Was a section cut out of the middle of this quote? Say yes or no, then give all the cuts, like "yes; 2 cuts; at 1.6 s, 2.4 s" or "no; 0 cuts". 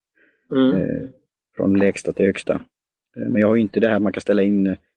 no; 0 cuts